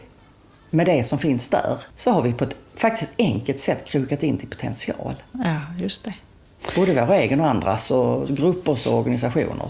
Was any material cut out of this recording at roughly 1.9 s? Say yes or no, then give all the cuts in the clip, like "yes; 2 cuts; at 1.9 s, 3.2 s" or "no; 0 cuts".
yes; 1 cut; at 1.9 s